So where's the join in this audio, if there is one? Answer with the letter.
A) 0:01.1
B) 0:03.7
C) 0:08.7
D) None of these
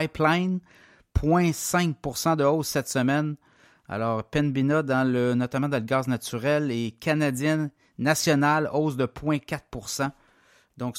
D